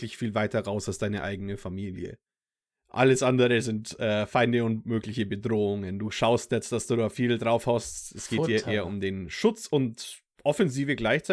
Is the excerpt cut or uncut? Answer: uncut